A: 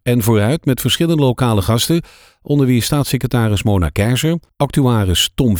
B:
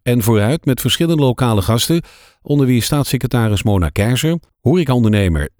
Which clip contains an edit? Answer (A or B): B